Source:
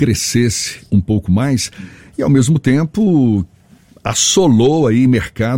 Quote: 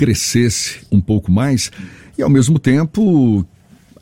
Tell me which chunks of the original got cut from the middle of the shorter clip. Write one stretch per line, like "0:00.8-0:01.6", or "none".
none